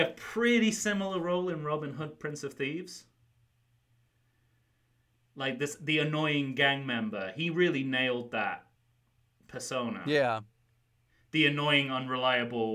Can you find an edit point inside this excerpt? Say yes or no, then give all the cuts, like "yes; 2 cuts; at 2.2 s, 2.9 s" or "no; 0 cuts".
no; 0 cuts